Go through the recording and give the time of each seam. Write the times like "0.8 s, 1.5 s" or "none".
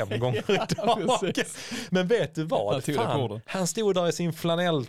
none